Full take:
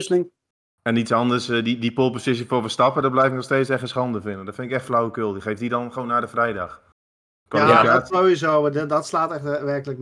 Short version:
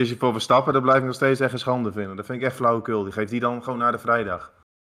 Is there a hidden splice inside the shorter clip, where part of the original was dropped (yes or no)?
no